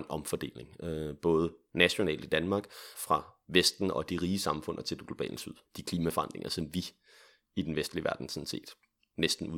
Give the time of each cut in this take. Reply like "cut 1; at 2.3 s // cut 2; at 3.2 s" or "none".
cut 1; at 2.9 s // cut 2; at 5.7 s